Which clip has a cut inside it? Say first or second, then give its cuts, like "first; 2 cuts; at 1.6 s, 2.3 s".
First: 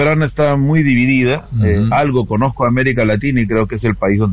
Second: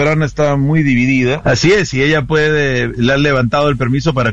second; 2 cuts; at 1.4 s, 3.0 s